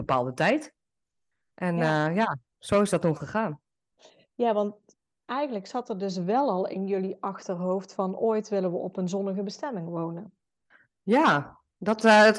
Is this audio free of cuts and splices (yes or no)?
yes